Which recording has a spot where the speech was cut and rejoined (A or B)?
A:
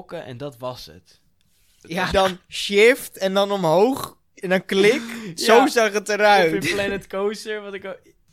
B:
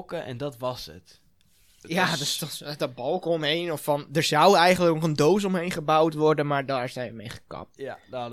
A